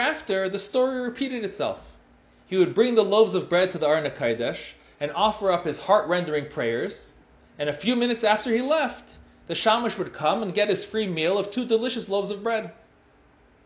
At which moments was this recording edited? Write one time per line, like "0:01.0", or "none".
none